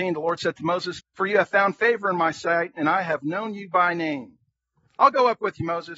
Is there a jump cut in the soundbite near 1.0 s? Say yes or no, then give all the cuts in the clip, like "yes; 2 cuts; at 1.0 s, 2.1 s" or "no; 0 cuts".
yes; 1 cut; at 1.0 s